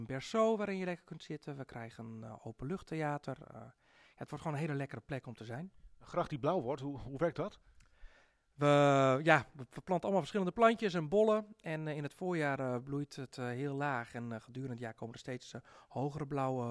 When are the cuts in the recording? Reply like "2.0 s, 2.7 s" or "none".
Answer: none